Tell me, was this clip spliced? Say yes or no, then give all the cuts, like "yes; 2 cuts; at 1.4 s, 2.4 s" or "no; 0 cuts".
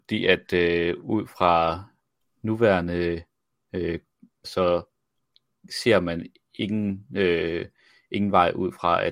yes; 1 cut; at 4.4 s